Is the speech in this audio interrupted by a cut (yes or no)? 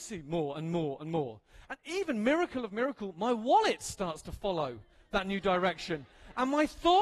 no